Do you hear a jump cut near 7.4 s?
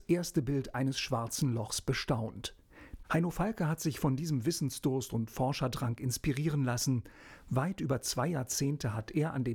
no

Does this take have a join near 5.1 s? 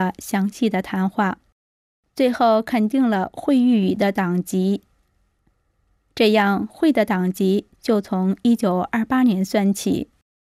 no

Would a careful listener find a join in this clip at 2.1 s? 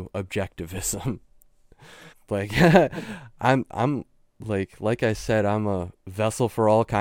yes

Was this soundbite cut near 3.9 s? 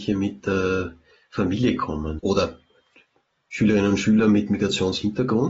no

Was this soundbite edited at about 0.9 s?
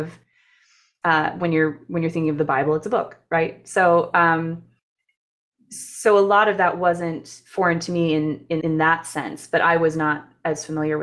no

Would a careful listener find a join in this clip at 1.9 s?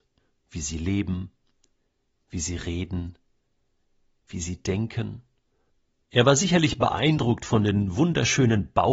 no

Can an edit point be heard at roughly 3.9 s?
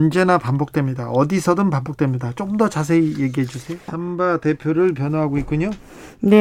yes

